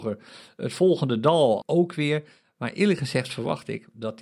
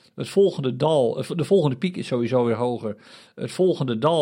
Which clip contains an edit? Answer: first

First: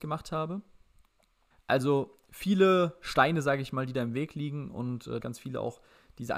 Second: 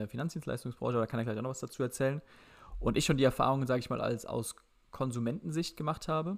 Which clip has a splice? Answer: first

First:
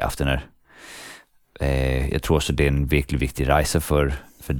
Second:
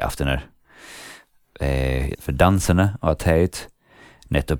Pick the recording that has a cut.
second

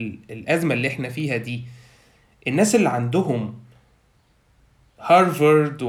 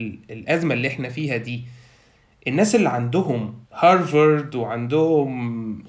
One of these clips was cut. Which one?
second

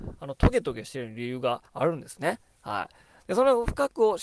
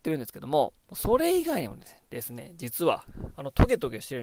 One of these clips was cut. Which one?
first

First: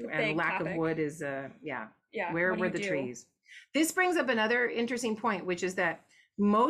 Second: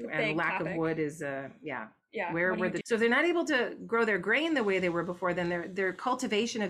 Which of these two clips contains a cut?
second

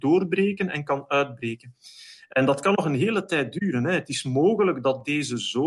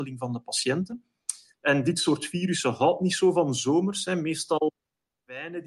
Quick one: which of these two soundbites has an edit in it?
second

